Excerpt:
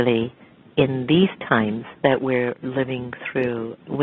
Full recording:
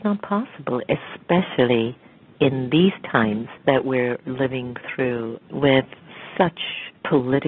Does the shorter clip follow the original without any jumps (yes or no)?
yes